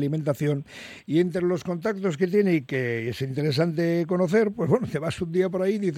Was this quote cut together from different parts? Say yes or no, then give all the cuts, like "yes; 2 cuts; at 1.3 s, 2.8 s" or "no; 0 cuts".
no; 0 cuts